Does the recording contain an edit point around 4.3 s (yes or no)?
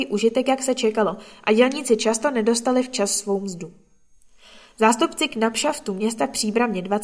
no